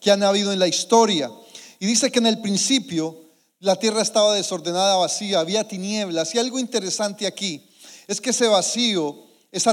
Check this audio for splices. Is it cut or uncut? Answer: uncut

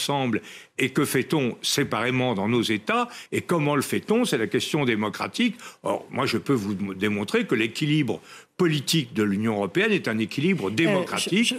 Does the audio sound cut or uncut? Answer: uncut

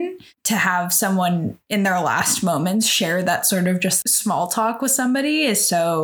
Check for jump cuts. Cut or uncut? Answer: uncut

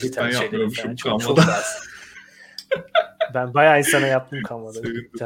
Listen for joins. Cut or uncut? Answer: uncut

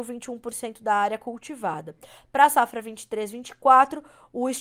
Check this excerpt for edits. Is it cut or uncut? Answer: uncut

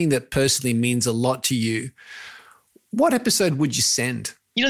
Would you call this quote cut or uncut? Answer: uncut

